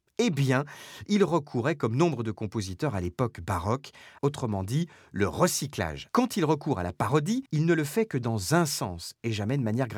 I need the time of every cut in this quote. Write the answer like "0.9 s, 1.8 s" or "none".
4.2 s, 6.1 s, 7.5 s